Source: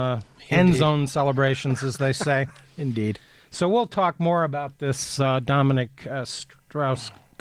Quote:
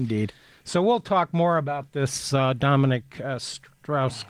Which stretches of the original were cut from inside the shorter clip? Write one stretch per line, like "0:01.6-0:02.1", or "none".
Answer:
none